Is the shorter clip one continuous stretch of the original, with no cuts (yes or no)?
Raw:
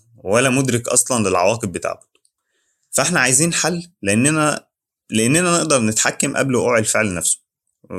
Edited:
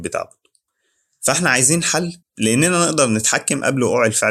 no